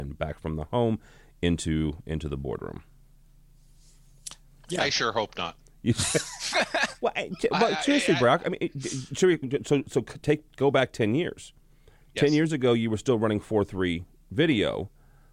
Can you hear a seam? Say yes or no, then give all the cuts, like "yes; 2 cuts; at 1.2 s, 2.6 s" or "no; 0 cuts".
no; 0 cuts